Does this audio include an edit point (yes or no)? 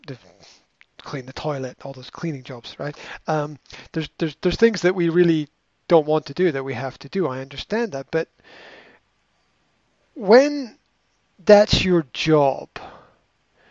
no